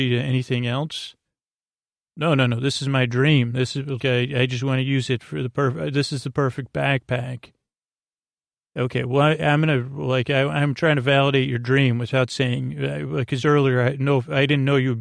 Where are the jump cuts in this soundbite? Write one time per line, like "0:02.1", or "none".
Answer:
0:04.0
0:13.4